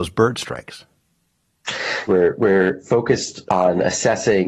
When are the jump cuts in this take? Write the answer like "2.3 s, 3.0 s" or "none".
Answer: 2.1 s, 3.5 s